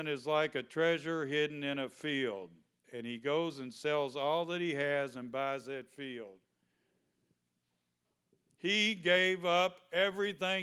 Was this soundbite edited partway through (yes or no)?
yes